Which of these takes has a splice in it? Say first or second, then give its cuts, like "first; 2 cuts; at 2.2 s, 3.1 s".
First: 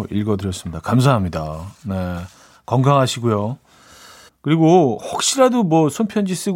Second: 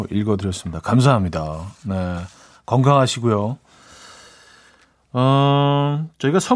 first; 1 cut; at 4.3 s